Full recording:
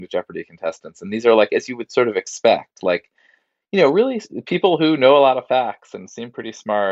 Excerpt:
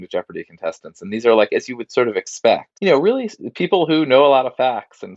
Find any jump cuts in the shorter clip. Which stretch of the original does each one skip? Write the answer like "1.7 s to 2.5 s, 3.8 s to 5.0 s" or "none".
2.8 s to 3.7 s